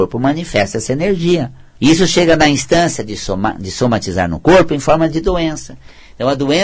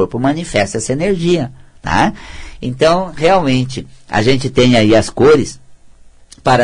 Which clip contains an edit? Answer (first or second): first